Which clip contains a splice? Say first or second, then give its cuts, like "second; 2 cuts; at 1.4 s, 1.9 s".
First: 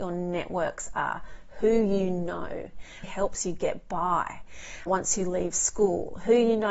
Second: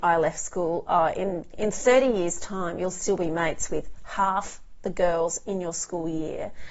first; 2 cuts; at 3.0 s, 4.9 s